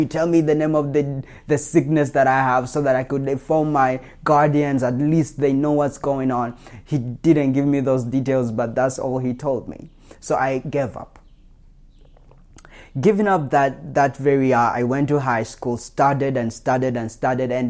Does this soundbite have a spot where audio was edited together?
no; 0 cuts

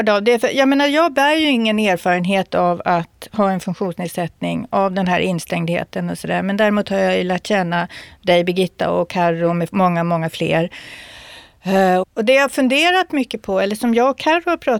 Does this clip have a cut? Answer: yes; 1 cut; at 12.0 s

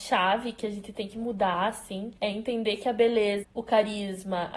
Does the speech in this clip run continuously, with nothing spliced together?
no; 2 cuts; at 2.2 s, 3.4 s

